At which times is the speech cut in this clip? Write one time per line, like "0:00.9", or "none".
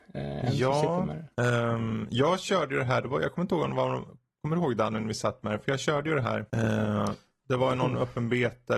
none